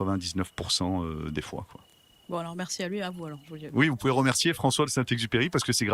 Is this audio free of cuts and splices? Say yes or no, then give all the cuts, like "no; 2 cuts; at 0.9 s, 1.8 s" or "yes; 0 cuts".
yes; 0 cuts